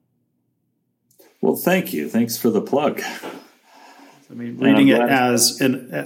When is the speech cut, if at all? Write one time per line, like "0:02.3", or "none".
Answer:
none